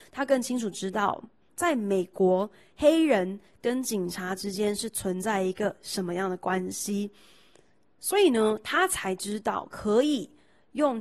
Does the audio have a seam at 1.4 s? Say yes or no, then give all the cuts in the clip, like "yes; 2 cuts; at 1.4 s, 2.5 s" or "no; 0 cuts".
no; 0 cuts